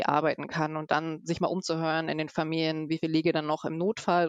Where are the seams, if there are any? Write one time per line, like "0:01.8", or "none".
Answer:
none